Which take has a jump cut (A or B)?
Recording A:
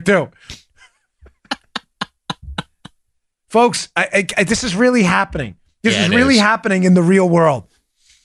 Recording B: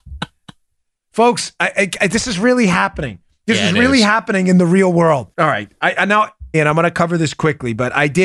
B